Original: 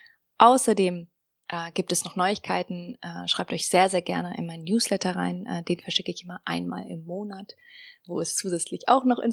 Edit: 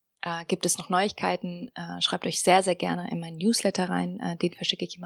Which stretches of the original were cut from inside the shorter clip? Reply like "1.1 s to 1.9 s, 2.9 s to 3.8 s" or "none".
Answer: none